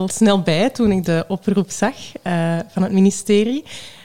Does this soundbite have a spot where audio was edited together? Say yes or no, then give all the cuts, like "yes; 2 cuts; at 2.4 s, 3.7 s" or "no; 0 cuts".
no; 0 cuts